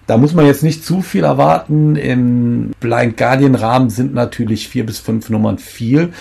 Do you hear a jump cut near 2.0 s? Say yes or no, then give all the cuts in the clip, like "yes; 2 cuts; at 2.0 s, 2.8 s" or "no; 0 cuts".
no; 0 cuts